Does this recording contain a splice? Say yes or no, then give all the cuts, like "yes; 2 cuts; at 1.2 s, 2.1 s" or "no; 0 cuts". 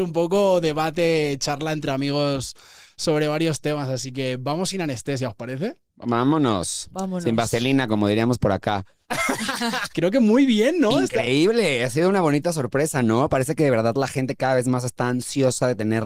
yes; 1 cut; at 9.9 s